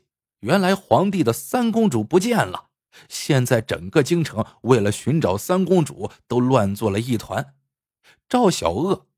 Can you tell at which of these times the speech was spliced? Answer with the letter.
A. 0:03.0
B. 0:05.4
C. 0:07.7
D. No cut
D